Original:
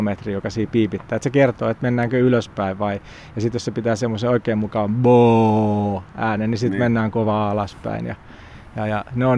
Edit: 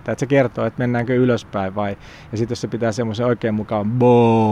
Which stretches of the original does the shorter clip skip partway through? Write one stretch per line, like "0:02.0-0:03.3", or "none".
none